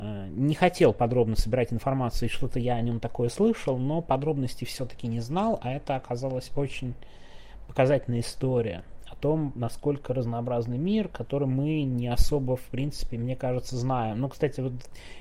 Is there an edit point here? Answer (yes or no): no